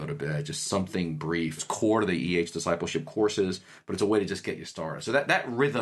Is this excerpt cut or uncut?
cut